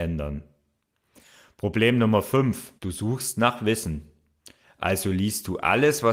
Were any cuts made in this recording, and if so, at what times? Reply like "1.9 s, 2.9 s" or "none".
2.8 s, 4.6 s